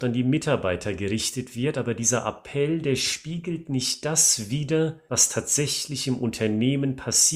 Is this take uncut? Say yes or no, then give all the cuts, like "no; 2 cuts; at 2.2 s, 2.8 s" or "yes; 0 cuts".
yes; 0 cuts